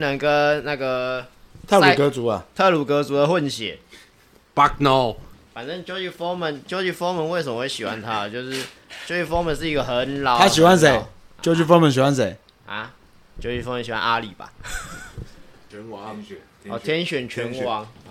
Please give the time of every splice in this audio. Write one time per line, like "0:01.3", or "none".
0:15.7